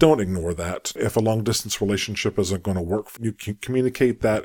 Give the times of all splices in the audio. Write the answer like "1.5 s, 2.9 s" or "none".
1.0 s, 3.2 s

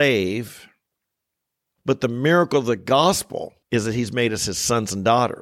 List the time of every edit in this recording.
1.8 s, 3.6 s

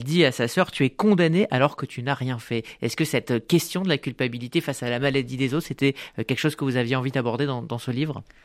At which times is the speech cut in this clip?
none

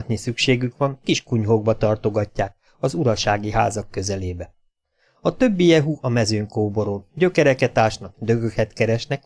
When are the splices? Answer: 8.1 s

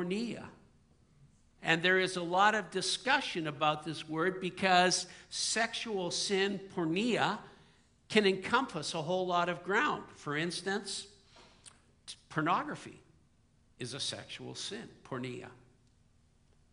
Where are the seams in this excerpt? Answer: 1.6 s

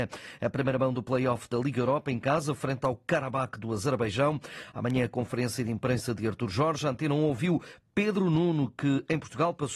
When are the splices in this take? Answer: none

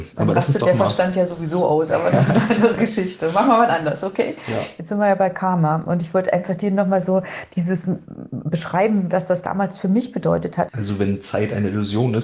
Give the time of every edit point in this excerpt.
10.7 s

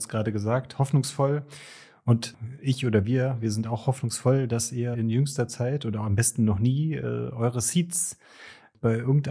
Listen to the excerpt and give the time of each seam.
4.9 s

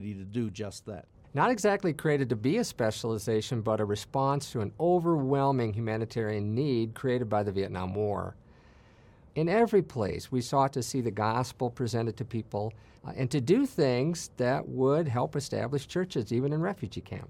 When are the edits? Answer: 1.2 s, 9.3 s, 13.0 s

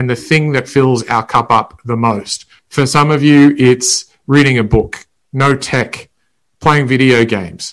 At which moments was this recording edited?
2.6 s

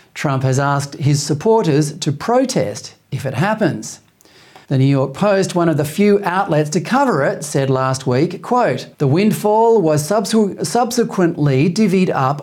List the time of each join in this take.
4.6 s, 8.9 s

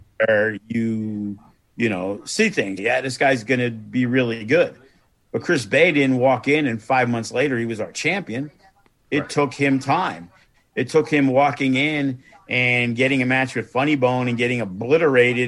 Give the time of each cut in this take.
2.8 s

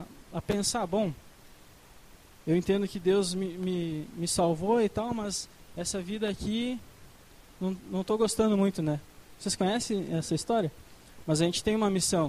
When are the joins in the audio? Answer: 9.4 s, 11.2 s

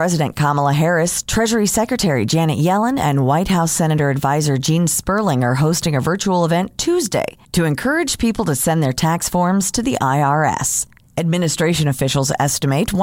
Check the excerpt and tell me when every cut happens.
none

